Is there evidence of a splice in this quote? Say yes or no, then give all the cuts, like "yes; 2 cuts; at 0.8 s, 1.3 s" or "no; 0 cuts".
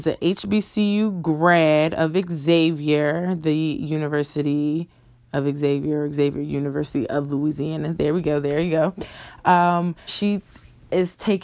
yes; 1 cut; at 10.1 s